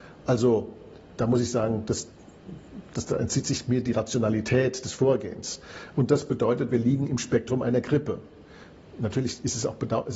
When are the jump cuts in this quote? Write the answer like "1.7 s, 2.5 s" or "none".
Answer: 1.2 s, 5.9 s